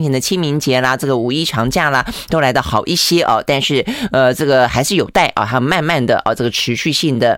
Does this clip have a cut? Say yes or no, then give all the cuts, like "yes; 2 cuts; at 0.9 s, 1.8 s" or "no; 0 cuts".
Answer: no; 0 cuts